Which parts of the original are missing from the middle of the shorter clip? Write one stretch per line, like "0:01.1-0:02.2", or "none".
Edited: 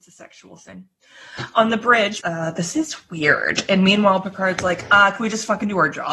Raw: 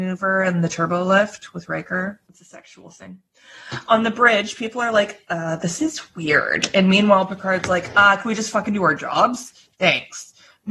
0:04.5-0:05.3